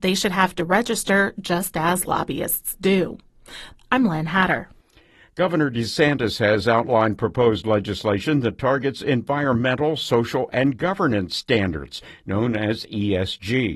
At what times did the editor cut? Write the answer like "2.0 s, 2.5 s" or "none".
3.7 s